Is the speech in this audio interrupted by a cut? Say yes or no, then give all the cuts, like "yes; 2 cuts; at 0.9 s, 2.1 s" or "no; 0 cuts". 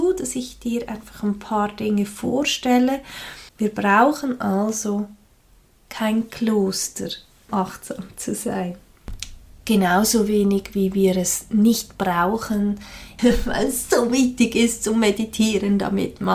yes; 3 cuts; at 3.5 s, 7.5 s, 13.2 s